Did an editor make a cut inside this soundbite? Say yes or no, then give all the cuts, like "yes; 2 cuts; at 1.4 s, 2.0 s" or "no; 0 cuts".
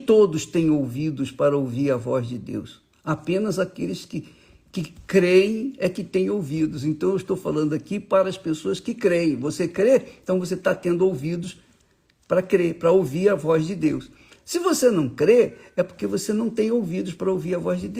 no; 0 cuts